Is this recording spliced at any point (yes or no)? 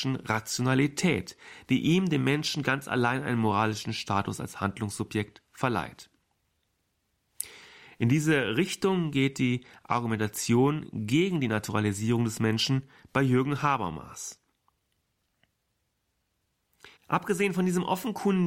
yes